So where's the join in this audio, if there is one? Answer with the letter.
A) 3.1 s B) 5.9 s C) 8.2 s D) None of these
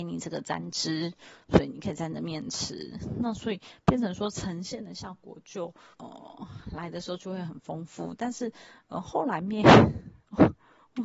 B